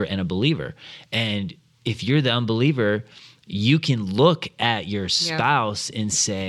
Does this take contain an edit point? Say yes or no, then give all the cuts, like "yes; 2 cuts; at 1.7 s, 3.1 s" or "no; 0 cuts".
no; 0 cuts